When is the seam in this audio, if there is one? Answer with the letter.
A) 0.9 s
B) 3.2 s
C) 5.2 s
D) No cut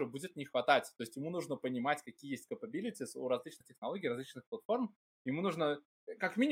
D